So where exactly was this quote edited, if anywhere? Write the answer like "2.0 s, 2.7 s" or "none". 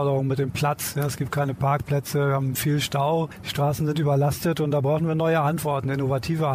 none